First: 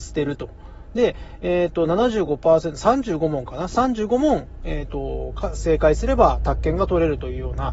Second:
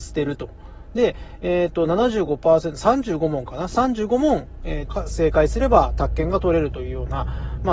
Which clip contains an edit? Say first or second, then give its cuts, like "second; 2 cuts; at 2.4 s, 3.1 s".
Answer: second; 1 cut; at 4.9 s